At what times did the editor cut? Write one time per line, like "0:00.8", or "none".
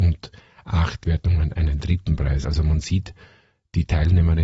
none